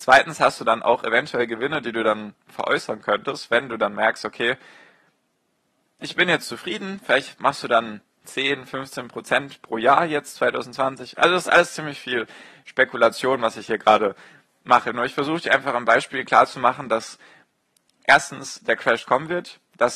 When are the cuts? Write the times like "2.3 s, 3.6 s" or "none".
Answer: none